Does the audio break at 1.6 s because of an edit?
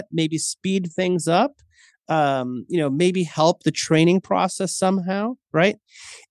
no; 0 cuts

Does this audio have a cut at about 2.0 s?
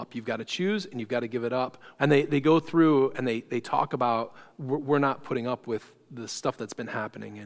yes; 1 cut; at 2.0 s

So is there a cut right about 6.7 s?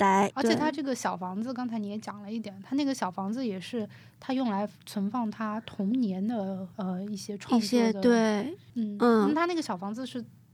yes; 1 cut; at 6.7 s

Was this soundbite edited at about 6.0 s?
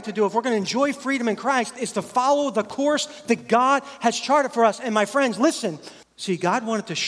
yes; 1 cut; at 6.0 s

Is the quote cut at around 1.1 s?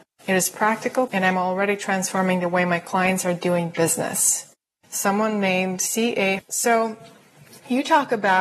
yes; 3 cuts; at 1.1 s, 4.7 s, 6.4 s

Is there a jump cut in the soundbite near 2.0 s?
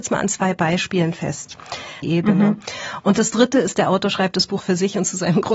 yes; 2 cuts; at 2.0 s, 4.6 s

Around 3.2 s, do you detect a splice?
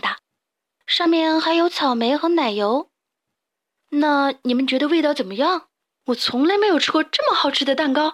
yes; 2 cuts; at 3.2 s, 5.9 s

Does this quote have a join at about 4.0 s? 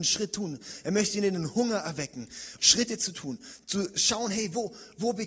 no; 1 cut; at 2.6 s

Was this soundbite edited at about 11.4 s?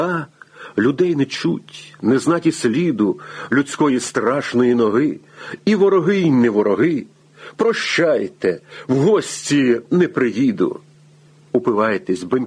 no; 0 cuts

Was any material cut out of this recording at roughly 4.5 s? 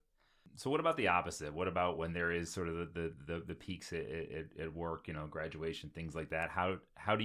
no; 0 cuts

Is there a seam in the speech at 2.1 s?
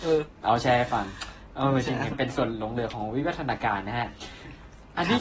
yes; 1 cut; at 2.1 s

